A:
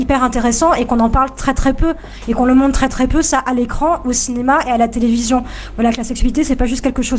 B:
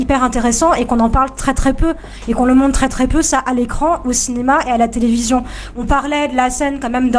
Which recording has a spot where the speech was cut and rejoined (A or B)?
B